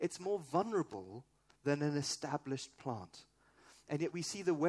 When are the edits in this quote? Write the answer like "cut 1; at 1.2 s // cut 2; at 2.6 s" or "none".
none